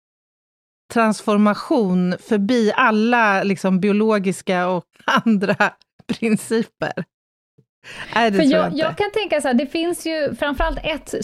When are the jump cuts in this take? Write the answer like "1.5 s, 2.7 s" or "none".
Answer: 4.9 s